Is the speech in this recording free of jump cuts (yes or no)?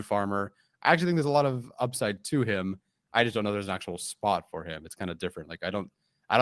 yes